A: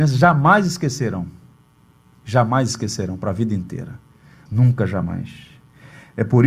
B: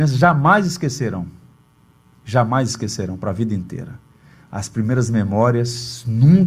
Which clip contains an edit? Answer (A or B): A